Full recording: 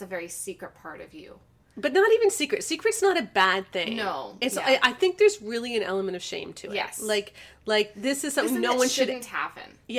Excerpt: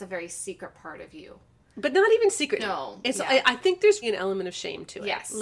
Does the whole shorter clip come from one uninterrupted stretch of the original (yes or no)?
no